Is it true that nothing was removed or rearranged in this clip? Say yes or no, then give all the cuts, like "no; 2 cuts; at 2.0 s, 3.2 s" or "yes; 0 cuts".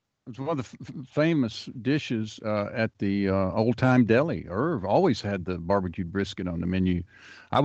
yes; 0 cuts